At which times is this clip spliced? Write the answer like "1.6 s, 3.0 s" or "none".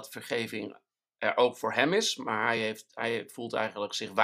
none